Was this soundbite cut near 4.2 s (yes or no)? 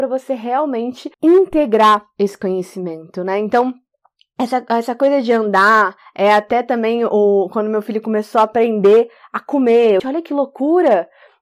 no